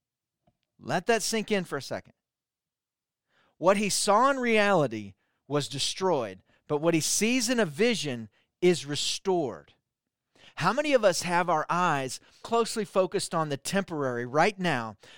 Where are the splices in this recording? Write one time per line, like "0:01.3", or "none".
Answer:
0:12.4

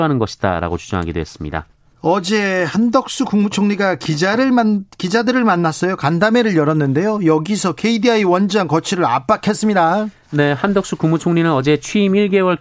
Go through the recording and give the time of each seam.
none

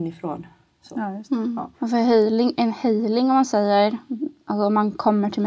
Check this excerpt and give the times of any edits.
0:01.7

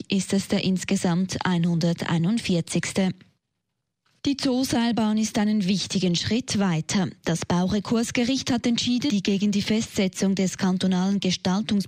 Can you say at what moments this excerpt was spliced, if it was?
0:09.1

